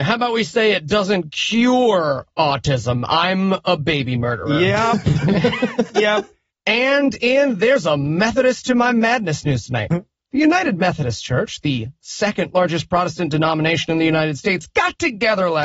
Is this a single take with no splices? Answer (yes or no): yes